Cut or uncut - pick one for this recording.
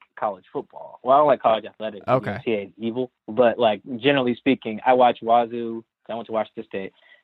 uncut